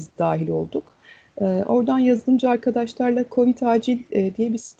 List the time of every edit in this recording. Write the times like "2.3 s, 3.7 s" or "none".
none